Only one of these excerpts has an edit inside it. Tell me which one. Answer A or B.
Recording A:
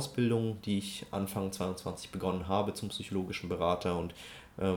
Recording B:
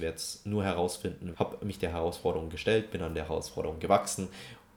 B